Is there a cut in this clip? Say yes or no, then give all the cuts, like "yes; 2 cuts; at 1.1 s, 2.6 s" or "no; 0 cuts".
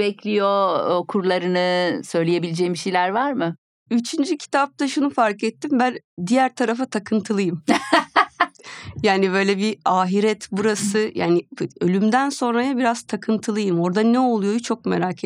no; 0 cuts